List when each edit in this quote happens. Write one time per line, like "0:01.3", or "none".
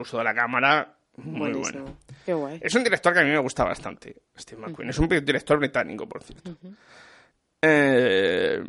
none